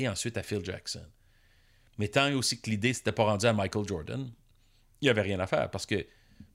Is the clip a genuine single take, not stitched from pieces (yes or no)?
yes